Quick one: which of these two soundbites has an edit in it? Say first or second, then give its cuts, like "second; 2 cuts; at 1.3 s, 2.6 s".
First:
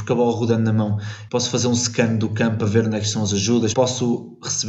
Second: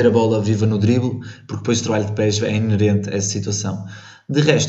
first; 2 cuts; at 1.3 s, 3.7 s